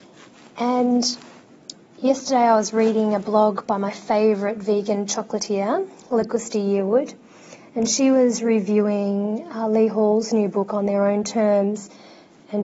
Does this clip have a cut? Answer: no; 0 cuts

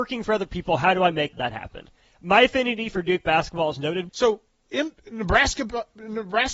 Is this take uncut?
no; 2 cuts; at 1.3 s, 4.1 s

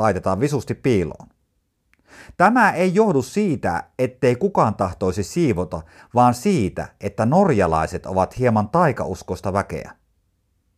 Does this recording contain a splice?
no; 0 cuts

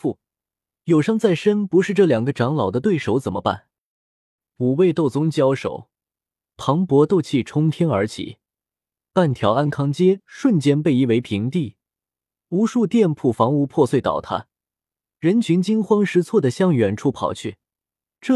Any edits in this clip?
no; 0 cuts

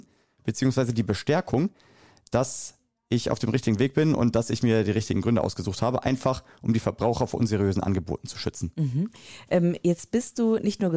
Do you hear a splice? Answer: no; 0 cuts

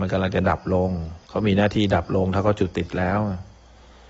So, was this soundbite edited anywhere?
yes; 1 cut; at 1.2 s

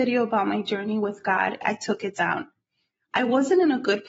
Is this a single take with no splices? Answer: no; 1 cut; at 1.6 s

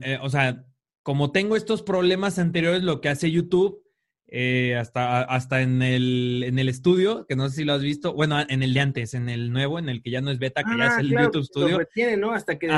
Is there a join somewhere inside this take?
no; 0 cuts

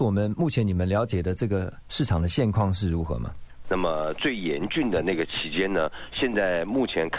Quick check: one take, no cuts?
no; 1 cut; at 3.6 s

